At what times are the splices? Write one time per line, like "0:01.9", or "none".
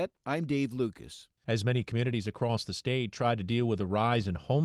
0:01.4